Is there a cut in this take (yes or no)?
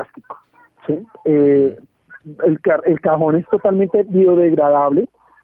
no